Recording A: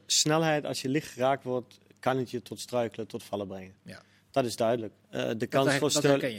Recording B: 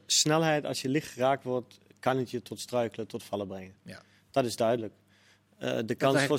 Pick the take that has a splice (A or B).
A